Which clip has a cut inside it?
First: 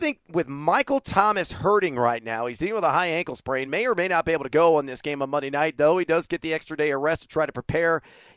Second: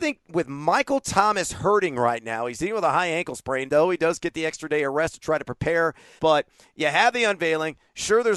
second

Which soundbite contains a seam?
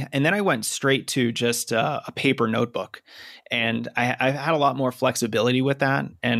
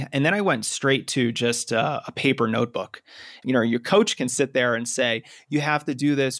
second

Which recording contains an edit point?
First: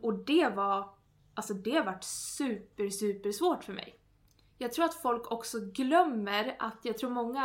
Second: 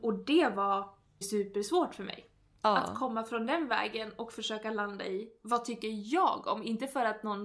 second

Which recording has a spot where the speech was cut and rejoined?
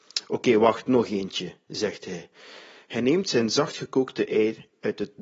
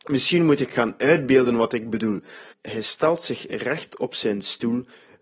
second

